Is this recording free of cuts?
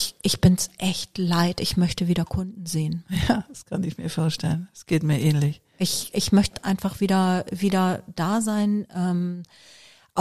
yes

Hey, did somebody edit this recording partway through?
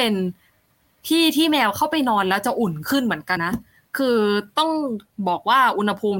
yes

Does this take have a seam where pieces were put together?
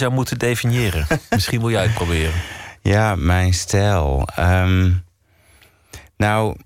no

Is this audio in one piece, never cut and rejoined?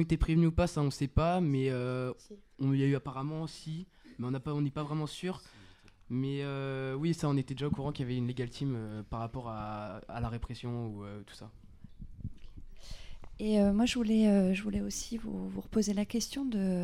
yes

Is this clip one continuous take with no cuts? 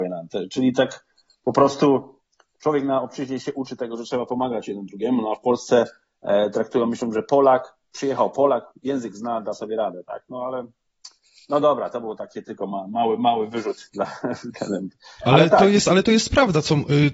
yes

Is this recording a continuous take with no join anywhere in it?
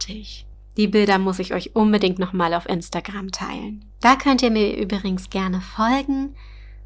no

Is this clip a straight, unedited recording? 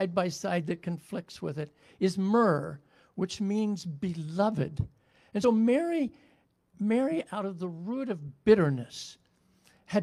no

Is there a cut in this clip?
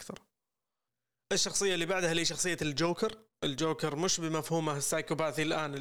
no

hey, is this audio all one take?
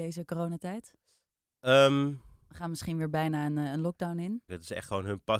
no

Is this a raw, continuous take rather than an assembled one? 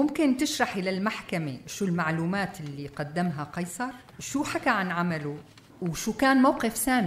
no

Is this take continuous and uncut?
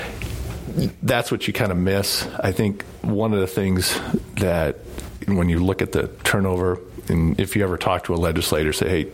yes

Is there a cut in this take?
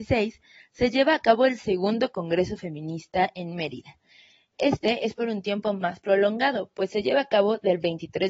no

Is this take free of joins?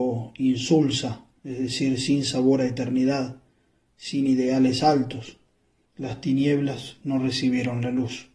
no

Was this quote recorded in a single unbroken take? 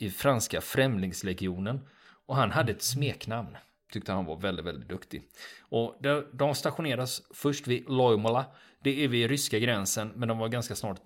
no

